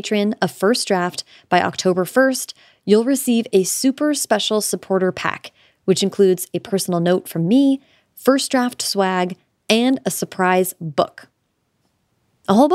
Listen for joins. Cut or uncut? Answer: uncut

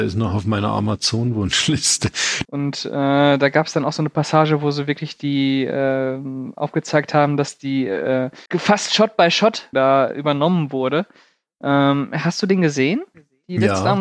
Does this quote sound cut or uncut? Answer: cut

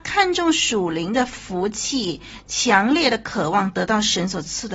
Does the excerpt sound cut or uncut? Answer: uncut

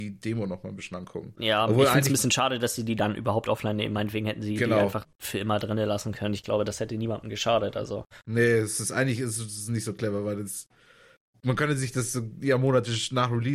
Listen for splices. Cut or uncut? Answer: uncut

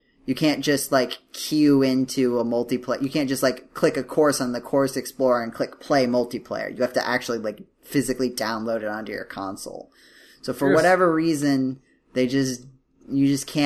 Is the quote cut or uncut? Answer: uncut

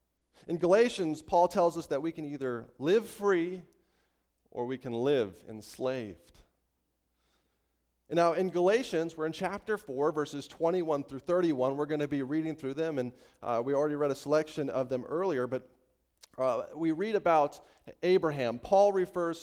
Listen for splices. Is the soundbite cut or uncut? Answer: uncut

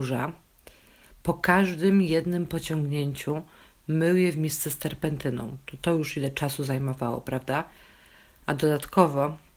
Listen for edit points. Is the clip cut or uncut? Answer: uncut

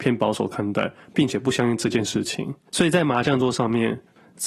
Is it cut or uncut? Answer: cut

